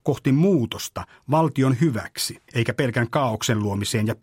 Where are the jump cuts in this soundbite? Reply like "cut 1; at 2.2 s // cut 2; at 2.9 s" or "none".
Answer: cut 1; at 2.5 s